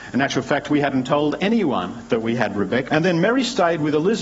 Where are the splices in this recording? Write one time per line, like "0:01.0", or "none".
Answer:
0:02.9